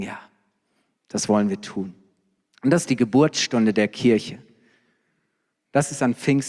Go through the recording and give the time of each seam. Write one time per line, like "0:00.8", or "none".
none